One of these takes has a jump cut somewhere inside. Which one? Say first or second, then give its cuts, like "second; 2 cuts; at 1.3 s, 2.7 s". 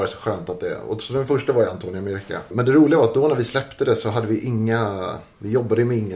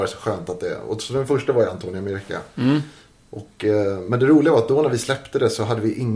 first; 1 cut; at 2.5 s